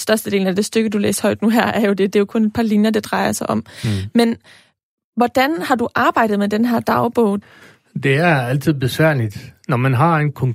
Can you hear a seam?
no; 0 cuts

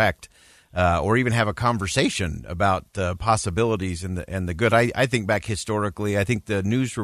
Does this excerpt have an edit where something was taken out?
no; 0 cuts

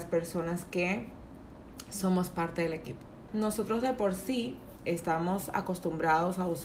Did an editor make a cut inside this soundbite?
yes; 1 cut; at 3.3 s

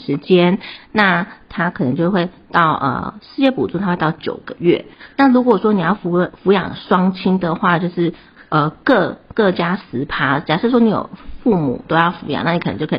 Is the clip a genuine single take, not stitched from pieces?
yes; 0 cuts

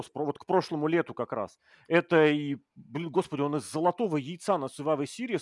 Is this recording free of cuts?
yes; 0 cuts

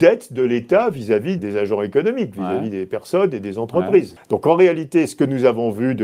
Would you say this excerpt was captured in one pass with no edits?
no; 2 cuts; at 1.4 s, 4.2 s

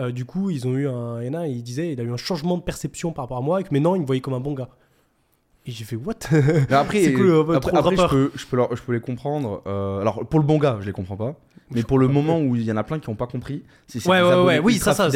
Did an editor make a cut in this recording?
no; 0 cuts

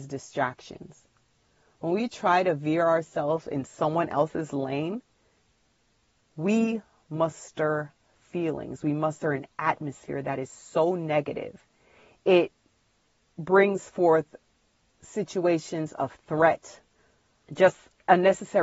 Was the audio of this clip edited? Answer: yes; 1 cut; at 17.4 s

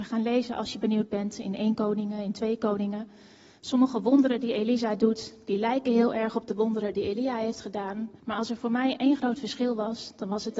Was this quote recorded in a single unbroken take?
no; 1 cut; at 8.2 s

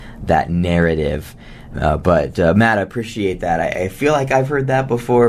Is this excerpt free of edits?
no; 1 cut; at 1.7 s

